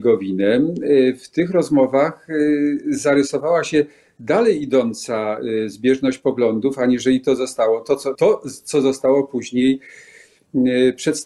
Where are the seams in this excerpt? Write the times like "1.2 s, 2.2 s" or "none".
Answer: 8.1 s